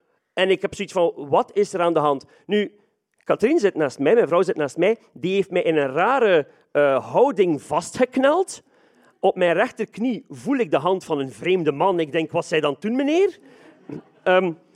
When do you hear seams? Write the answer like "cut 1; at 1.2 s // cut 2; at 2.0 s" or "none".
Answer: none